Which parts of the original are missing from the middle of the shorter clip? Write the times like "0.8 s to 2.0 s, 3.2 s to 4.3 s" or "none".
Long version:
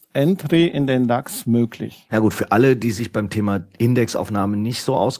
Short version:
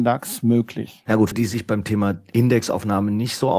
2.4 s to 2.8 s

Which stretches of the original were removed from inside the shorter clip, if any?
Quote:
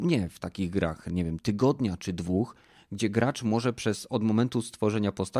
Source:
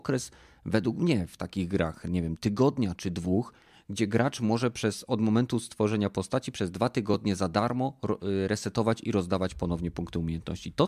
none

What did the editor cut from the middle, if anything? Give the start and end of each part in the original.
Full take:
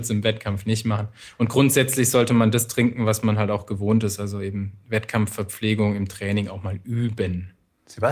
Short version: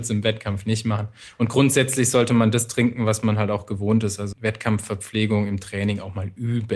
4.3 s to 4.8 s

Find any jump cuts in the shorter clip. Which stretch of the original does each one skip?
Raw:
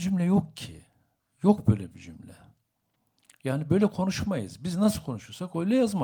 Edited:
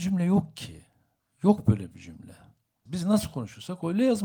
2.9 s to 4.6 s

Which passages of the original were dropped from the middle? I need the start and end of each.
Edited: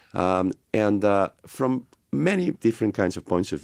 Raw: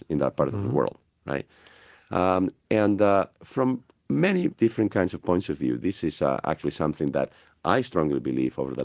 none

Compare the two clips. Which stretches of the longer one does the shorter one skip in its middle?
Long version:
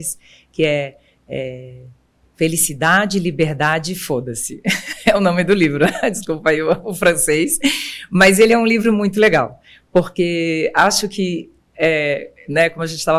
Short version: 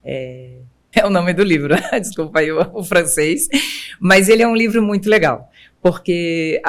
2.2 s to 5.0 s

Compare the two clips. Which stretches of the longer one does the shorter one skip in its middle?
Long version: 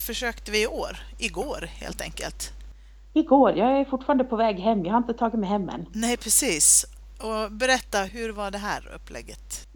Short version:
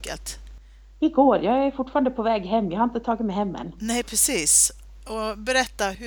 none

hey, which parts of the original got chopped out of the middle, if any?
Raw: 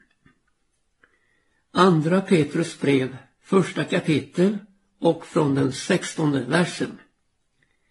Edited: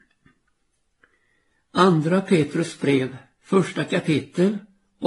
none

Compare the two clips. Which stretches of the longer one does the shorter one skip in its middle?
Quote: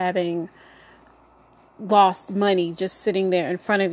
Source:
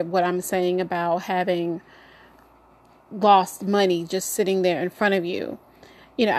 none

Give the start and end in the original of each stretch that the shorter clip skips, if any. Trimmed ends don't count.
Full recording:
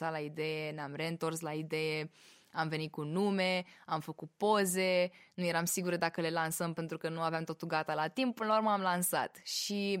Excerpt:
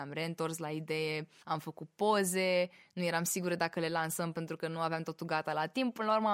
2.2 s to 3.8 s

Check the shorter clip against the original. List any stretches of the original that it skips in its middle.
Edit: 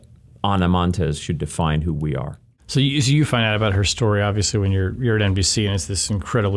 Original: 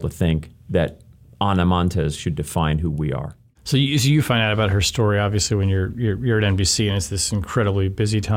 5.9 s to 6.2 s

